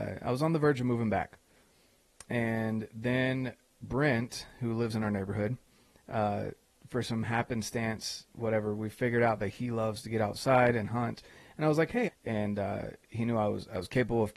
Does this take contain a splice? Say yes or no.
yes